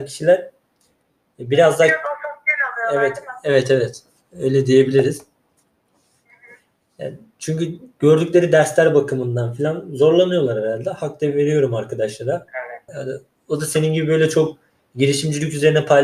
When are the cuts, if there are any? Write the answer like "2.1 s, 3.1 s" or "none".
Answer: 12.9 s